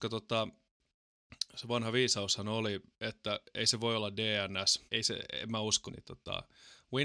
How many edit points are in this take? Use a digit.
2